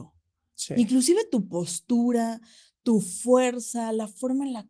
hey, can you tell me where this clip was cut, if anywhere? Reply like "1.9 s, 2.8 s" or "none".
none